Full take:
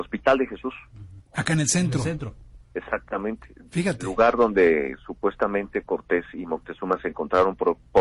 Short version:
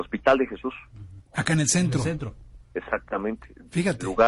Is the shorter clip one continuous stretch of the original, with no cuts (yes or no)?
yes